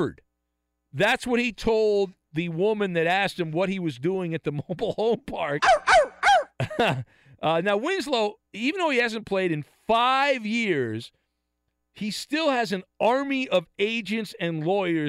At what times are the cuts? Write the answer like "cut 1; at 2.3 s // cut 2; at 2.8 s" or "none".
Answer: none